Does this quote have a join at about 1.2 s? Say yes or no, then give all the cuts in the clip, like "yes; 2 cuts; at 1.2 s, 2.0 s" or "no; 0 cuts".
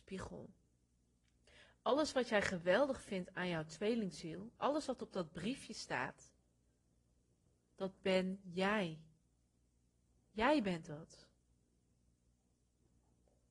no; 0 cuts